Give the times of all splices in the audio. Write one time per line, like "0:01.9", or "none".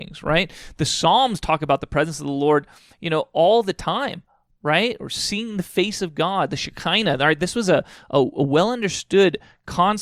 none

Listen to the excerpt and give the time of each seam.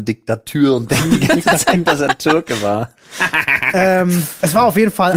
none

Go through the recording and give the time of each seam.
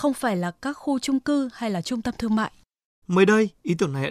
0:03.0

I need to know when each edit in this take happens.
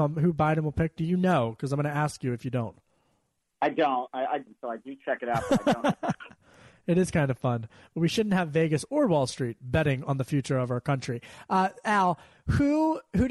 0:04.4

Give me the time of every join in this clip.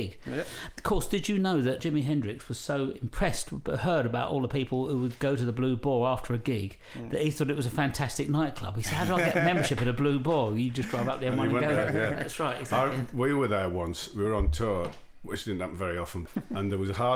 0:16.3

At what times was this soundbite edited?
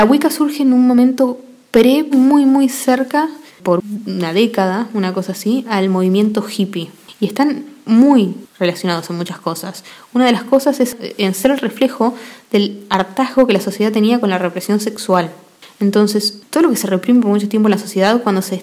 0:02.1

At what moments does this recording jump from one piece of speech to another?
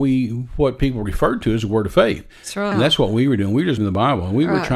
0:02.7
0:03.8

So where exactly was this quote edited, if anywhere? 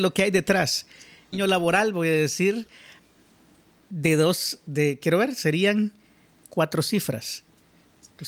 0:01.3

